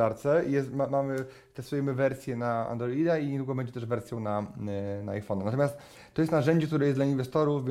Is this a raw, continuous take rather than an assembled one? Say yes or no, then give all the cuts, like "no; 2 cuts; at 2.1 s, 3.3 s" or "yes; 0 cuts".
yes; 0 cuts